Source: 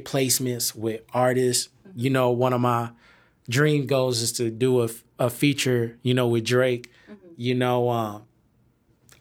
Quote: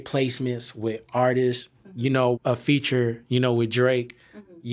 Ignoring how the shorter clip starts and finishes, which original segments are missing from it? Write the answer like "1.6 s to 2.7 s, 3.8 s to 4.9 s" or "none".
2.3 s to 5.1 s